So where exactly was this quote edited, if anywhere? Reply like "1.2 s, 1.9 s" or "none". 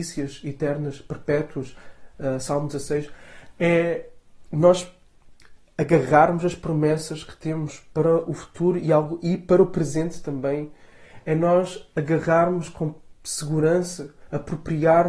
none